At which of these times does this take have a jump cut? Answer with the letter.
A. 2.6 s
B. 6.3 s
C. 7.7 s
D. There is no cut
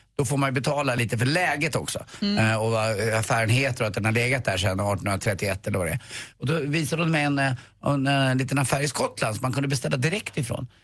B